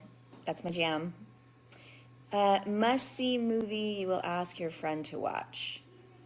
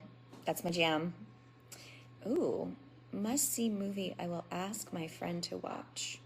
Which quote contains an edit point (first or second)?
second